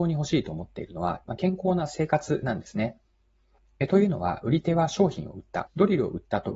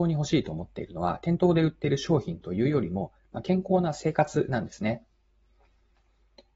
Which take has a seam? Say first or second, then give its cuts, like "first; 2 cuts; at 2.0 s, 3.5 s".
first; 3 cuts; at 1.2 s, 3.6 s, 5.7 s